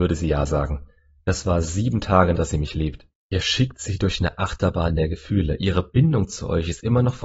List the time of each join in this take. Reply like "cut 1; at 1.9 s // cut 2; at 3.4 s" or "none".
cut 1; at 2.4 s